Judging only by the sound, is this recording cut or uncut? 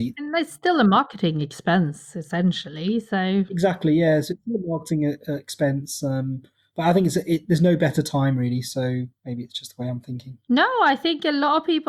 uncut